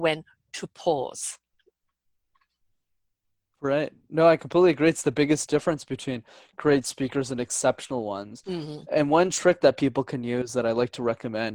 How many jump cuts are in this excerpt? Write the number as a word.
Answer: zero